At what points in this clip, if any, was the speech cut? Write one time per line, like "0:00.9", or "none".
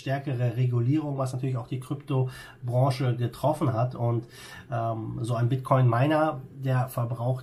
none

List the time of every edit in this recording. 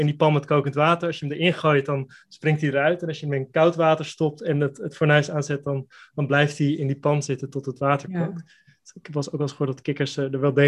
none

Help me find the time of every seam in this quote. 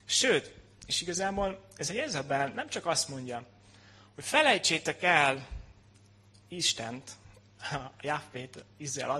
none

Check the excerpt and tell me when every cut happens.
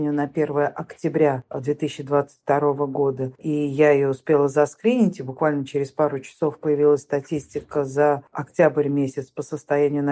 none

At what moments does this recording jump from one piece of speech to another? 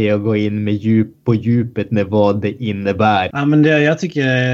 0:03.3

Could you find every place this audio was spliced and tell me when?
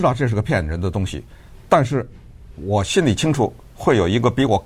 none

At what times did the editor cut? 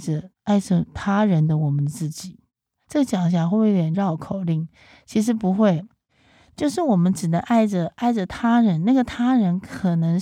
none

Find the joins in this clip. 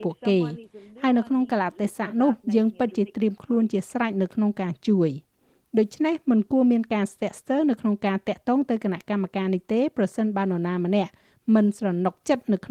none

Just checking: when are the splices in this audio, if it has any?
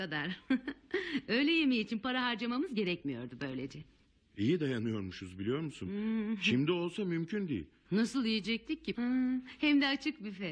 0:07.9
0:08.9

